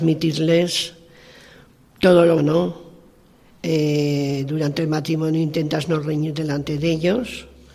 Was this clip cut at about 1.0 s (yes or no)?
no